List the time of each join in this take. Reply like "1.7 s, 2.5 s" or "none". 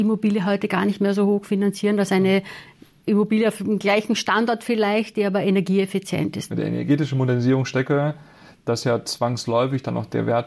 6.5 s

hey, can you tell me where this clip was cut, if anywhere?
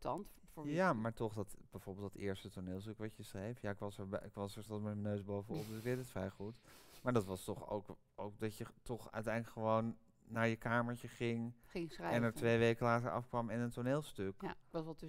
4.7 s

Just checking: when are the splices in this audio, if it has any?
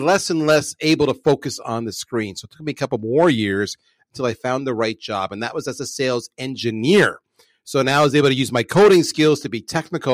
none

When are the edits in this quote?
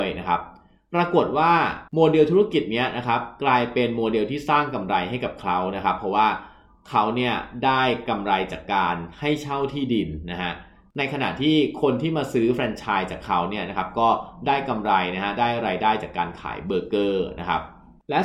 1.9 s

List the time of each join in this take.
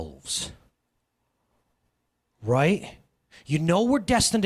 none

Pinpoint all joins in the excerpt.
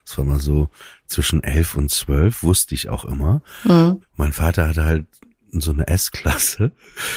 4.0 s

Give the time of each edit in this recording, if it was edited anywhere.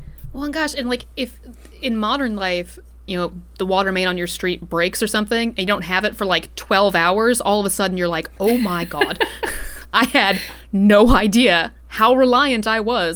3.1 s

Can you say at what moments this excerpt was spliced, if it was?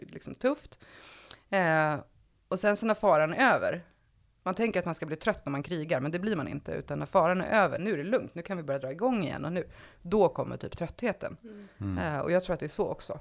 7.8 s

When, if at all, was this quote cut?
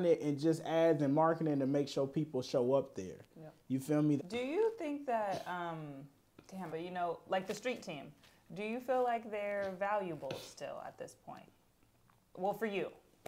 4.2 s, 6.7 s

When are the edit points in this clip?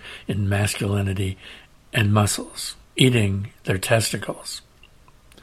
2.8 s

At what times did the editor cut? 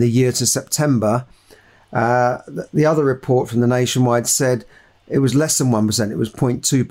none

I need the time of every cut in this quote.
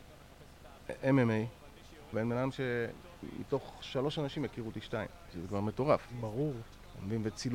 2.1 s

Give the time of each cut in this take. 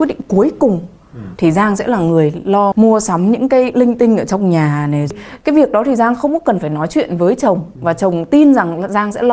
1.4 s, 2.7 s

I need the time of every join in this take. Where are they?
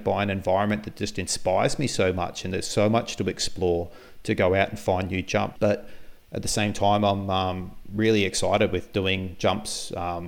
5.6 s

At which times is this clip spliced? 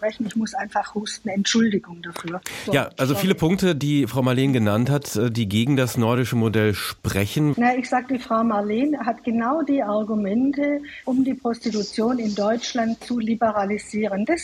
7.5 s, 11.0 s

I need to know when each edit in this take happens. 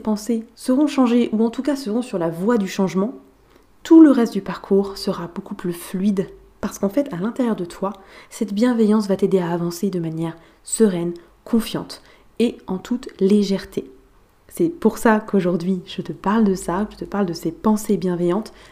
none

